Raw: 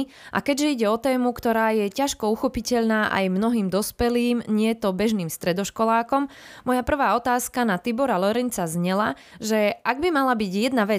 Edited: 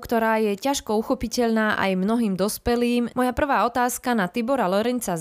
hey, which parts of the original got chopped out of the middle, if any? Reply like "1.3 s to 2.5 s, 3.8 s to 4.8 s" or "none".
4.4 s to 6.6 s